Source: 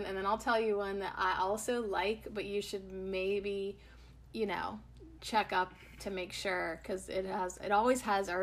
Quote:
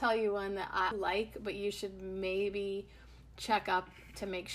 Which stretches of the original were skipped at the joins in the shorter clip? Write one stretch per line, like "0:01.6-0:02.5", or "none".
0:01.4-0:01.8
0:04.3-0:05.2